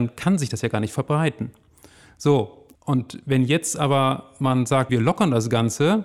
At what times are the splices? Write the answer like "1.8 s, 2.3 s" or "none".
2.8 s, 4.9 s